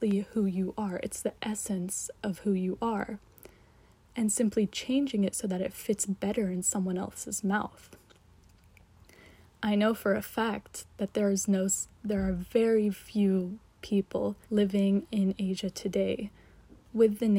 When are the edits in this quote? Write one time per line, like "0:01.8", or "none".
0:12.9
0:14.4